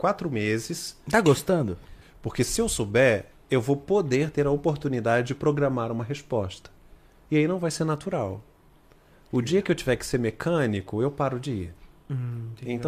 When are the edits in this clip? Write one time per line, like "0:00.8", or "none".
0:02.0

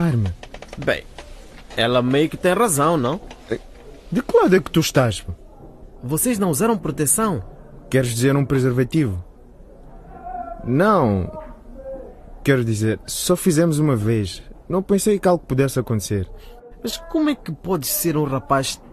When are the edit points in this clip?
0:13.0

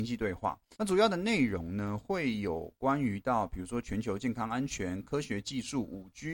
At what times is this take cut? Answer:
none

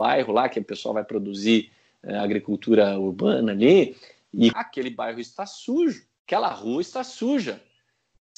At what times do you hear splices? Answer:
0:04.5
0:06.2

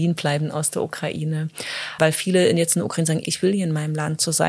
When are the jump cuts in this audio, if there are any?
0:02.0
0:03.2

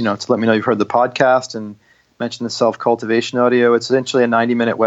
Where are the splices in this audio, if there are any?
none

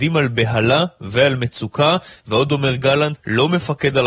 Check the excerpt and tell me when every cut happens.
0:03.2

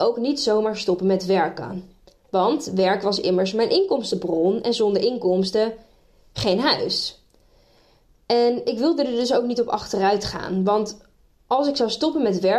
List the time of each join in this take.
none

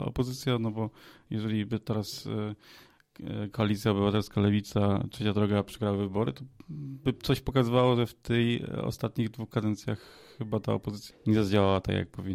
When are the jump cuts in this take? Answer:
0:11.1

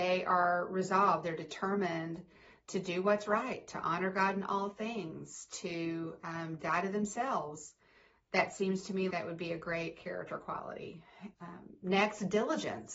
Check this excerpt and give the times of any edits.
0:09.1
0:11.3

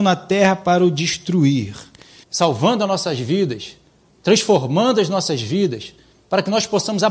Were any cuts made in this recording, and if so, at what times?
0:02.2

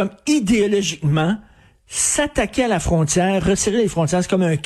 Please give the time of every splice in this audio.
0:03.4

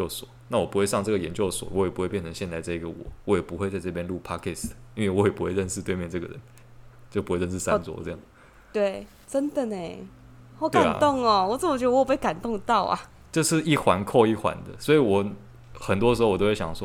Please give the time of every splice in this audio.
none

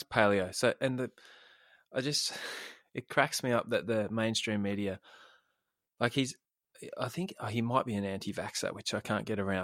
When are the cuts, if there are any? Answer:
none

